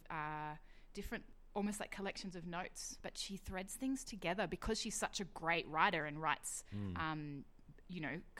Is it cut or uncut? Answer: uncut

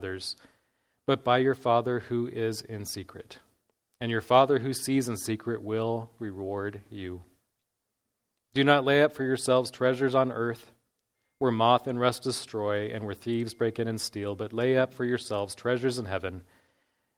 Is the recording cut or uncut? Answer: uncut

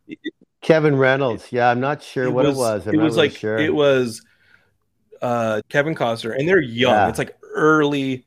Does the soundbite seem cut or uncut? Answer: cut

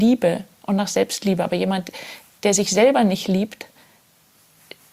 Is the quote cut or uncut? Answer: uncut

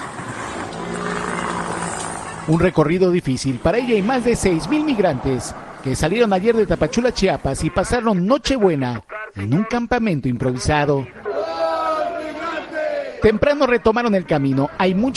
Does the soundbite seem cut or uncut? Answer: uncut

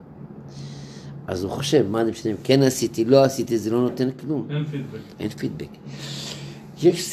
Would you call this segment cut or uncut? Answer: uncut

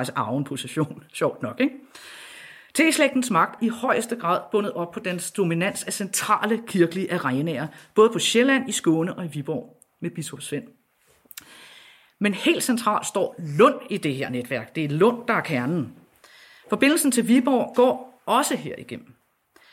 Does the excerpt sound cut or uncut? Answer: cut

